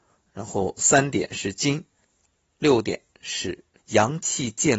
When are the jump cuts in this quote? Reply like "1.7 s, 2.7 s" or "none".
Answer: 3.8 s